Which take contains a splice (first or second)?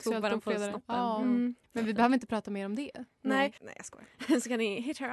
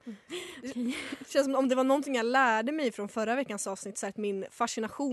first